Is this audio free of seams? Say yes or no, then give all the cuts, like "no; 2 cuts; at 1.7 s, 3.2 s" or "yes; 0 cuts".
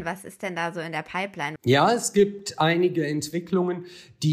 no; 1 cut; at 1.6 s